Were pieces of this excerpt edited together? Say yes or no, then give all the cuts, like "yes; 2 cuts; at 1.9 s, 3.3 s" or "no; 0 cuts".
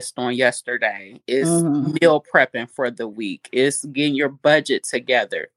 no; 0 cuts